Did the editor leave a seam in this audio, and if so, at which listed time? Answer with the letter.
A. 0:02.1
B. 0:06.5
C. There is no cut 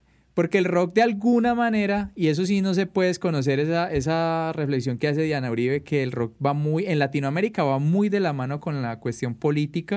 C